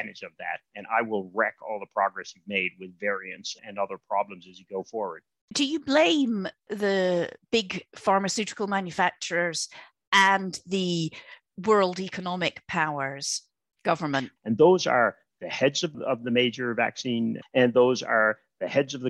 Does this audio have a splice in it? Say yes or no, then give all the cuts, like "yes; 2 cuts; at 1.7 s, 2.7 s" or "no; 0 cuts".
yes; 2 cuts; at 14.4 s, 17.4 s